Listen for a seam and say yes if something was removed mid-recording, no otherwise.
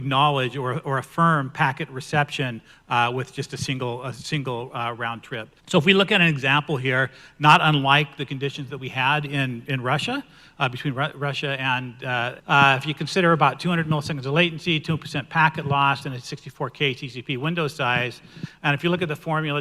yes